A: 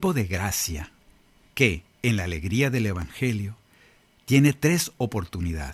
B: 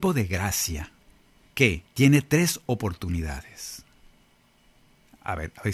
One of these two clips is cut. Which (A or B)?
B